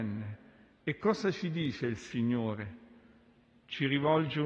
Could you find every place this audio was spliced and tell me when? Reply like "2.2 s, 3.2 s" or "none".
none